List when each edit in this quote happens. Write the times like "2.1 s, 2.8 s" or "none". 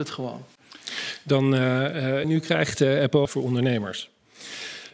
2.2 s, 3.3 s